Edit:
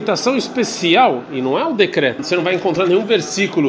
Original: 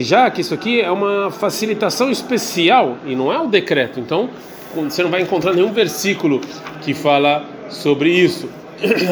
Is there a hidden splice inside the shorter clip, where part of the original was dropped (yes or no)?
yes